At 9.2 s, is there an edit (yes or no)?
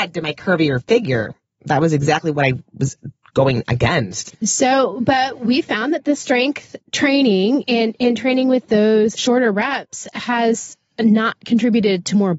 yes